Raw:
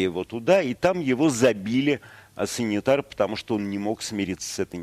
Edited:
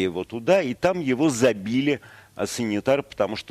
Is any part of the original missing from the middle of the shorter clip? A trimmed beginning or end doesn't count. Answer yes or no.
no